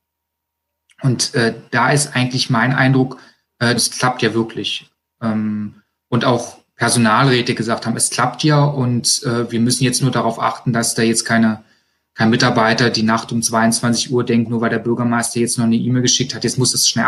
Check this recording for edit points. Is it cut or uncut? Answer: cut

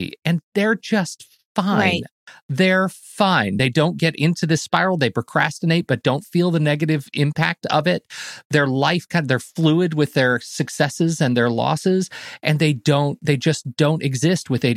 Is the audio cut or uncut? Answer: uncut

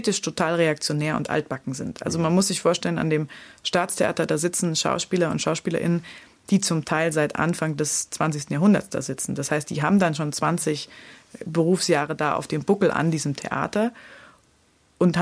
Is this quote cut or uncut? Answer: uncut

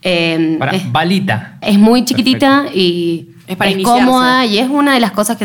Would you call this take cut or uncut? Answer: cut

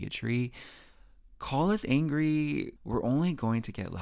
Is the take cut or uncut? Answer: cut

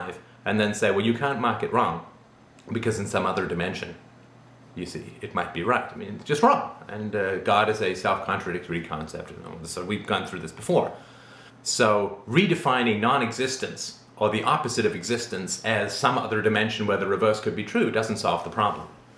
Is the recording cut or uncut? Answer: cut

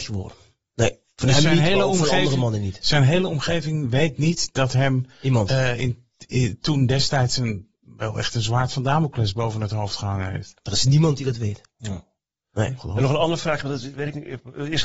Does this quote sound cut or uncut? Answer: uncut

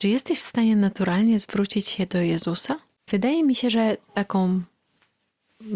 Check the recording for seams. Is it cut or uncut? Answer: cut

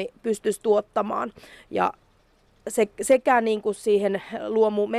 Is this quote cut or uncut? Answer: uncut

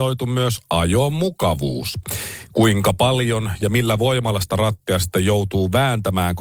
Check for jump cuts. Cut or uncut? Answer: uncut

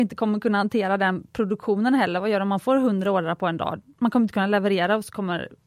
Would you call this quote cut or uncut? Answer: cut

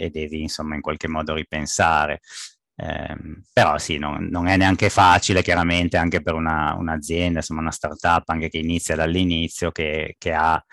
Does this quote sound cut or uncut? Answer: uncut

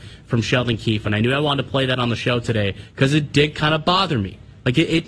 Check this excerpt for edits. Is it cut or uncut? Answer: uncut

